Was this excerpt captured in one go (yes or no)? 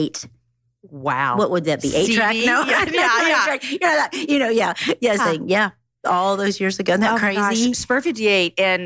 no